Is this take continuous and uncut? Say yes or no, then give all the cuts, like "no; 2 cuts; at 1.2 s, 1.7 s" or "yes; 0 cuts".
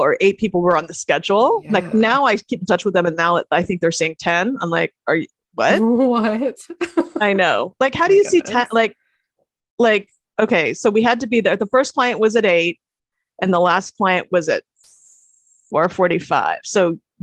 yes; 0 cuts